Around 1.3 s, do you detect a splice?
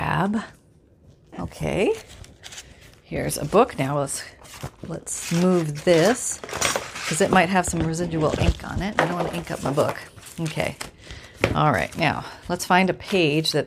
yes; 1 cut; at 1.3 s

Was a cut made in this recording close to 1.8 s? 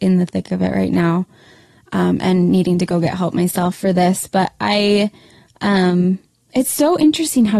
no; 0 cuts

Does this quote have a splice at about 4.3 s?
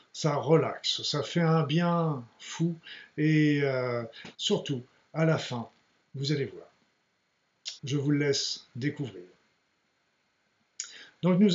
yes; 2 cuts; at 4.3 s, 7.8 s

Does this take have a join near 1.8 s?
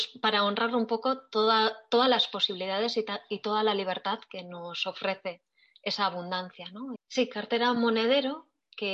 no; 1 cut; at 7.0 s

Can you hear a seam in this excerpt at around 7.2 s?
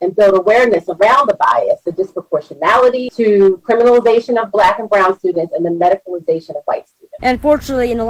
yes; 1 cut; at 7.2 s

